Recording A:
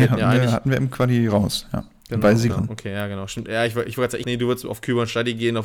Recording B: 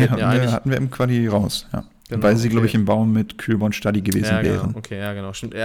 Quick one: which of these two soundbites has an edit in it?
A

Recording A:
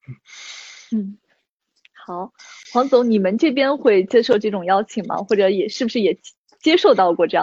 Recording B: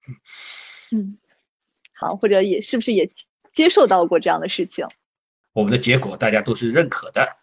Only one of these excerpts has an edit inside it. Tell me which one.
B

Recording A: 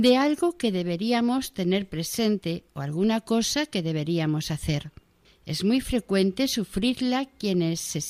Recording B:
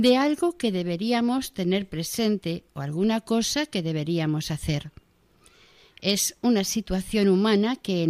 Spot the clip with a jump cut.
A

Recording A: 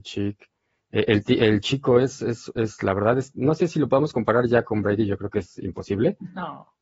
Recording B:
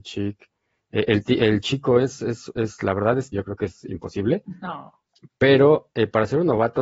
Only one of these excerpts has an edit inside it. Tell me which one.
B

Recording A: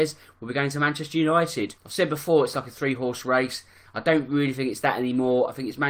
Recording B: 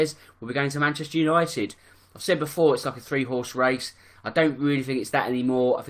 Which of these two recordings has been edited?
A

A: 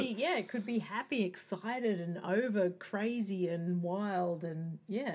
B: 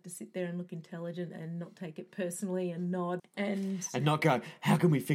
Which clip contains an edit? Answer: B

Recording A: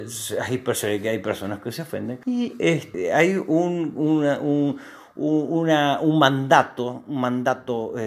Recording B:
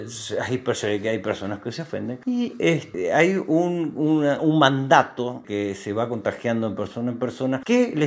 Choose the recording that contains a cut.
B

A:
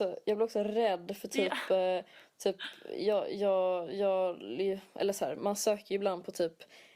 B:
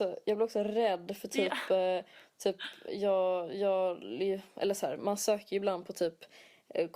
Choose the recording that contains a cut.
B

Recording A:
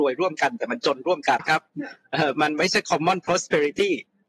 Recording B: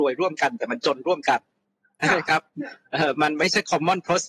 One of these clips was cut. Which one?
A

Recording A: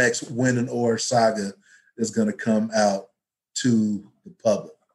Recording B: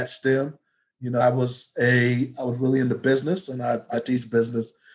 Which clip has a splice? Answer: B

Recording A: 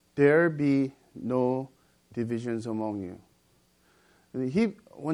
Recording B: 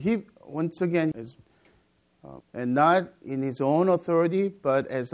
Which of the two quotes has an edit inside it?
B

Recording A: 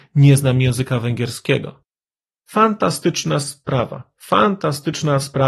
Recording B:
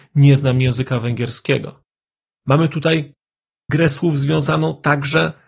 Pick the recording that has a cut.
B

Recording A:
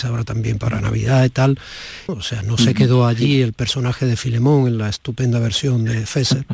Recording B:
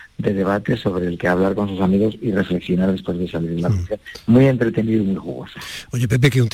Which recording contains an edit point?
A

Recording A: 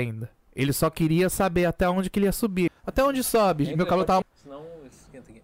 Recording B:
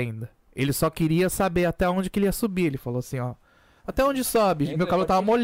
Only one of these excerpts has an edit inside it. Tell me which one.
A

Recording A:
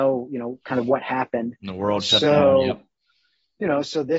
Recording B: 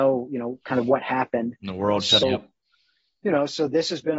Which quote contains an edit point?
B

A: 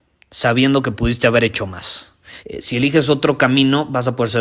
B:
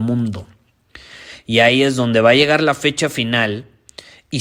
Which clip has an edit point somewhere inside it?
A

